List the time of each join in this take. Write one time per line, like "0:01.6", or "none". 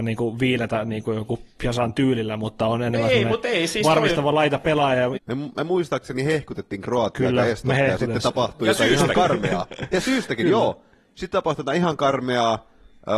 0:05.2